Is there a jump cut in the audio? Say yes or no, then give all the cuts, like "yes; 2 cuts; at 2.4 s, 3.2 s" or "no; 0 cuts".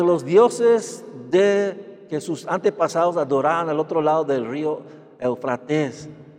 no; 0 cuts